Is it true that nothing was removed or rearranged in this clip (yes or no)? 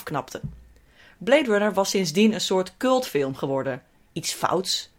yes